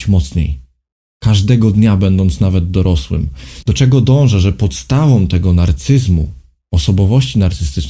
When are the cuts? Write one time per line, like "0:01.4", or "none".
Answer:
0:03.6